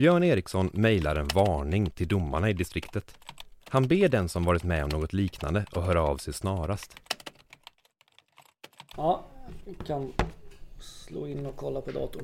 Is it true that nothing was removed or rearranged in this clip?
no; 2 cuts; at 3.6 s, 8.9 s

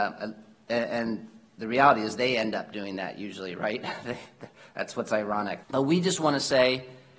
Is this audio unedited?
no; 1 cut; at 5.6 s

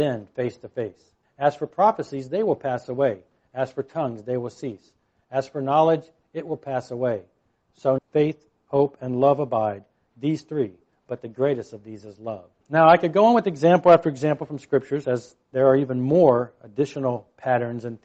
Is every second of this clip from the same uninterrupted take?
no; 3 cuts; at 1.2 s, 8.0 s, 12.6 s

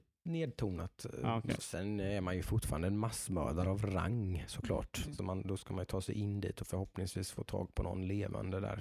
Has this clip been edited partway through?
yes; 2 cuts; at 1.6 s, 5.0 s

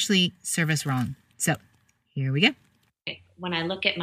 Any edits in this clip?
no; 0 cuts

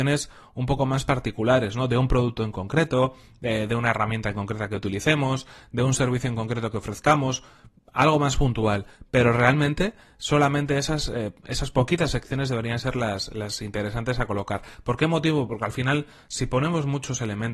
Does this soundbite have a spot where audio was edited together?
no; 0 cuts

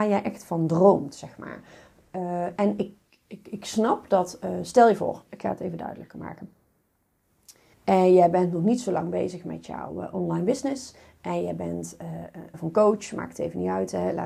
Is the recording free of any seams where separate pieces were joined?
no; 2 cuts; at 7.7 s, 12.5 s

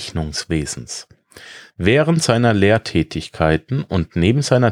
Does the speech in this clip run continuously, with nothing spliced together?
no; 1 cut; at 1.7 s

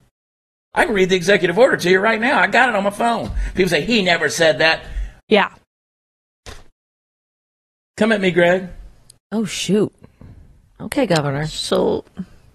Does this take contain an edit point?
yes; 1 cut; at 5.2 s

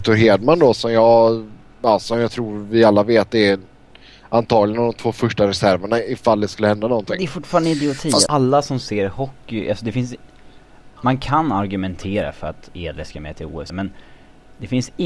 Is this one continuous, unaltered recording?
no; 3 cuts; at 8.3 s, 10.9 s, 13.7 s

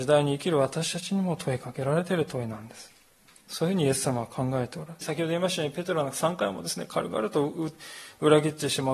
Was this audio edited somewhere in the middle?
yes; 2 cuts; at 3.4 s, 5.0 s

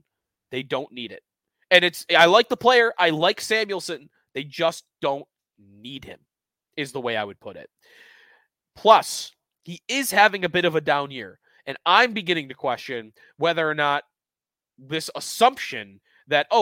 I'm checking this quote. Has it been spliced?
no; 0 cuts

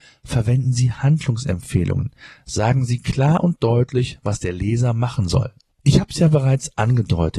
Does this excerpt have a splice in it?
yes; 1 cut; at 5.7 s

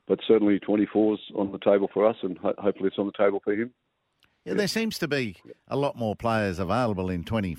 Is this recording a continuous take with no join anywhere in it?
yes; 0 cuts

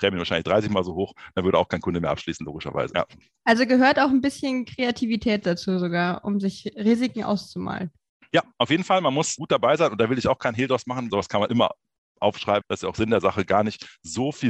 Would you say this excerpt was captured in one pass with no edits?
no; 3 cuts; at 2.9 s, 11.1 s, 12.6 s

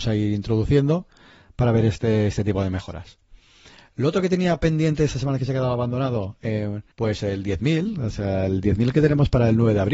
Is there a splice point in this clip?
yes; 1 cut; at 6.9 s

